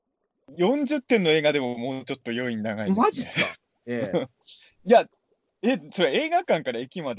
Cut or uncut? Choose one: uncut